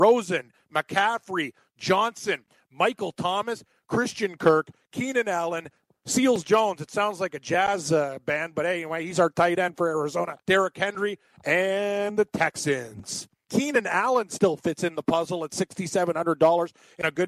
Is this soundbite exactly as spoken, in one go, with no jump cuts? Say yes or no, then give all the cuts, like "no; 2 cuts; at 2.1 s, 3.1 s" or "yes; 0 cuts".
no; 2 cuts; at 10.4 s, 13.4 s